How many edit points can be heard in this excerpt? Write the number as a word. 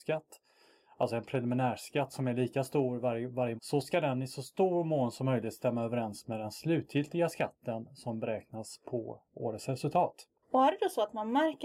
two